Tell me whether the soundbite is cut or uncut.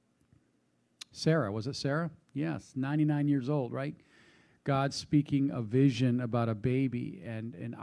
uncut